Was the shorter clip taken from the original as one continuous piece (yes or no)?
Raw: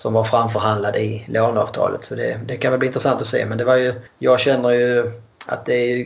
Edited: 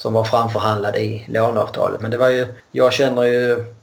no